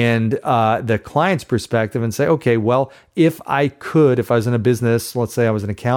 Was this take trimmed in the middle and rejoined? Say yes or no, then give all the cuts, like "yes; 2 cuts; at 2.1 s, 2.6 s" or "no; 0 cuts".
no; 0 cuts